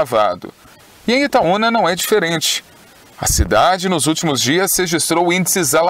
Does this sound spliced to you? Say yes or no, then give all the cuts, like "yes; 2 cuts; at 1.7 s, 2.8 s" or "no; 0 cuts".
no; 0 cuts